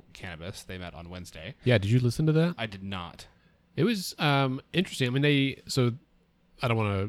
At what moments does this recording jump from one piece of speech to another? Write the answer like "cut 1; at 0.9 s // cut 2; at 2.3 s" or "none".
none